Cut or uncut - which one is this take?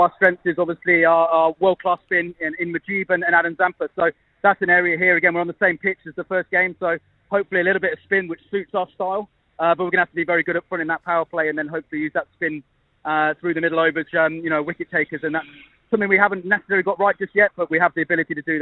cut